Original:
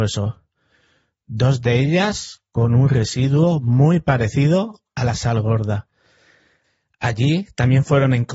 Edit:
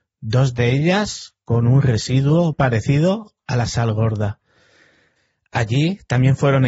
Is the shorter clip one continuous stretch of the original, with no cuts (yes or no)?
no